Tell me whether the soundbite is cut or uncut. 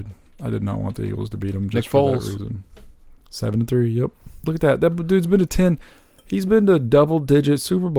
uncut